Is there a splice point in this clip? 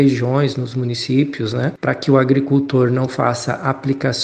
no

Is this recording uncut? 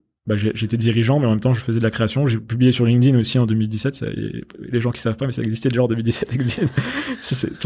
yes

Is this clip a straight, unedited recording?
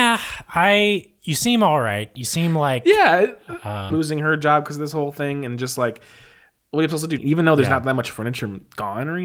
no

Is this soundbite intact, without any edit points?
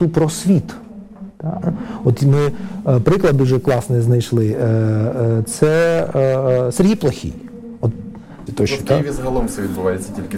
no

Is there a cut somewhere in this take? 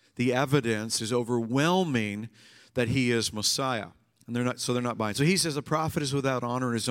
no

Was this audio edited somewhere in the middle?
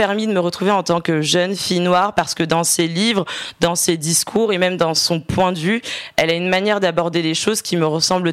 no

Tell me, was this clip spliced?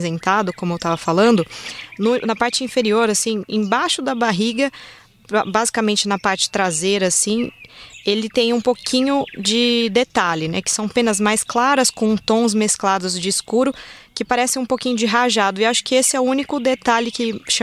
no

